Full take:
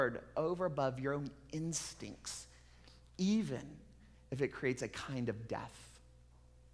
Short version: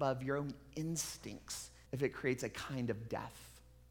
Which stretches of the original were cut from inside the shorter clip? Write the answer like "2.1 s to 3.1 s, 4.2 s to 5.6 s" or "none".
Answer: 2.6 s to 4.2 s